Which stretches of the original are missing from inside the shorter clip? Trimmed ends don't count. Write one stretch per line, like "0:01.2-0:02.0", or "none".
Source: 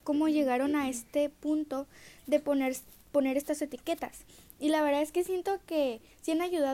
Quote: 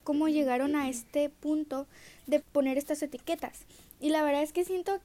0:02.4-0:03.0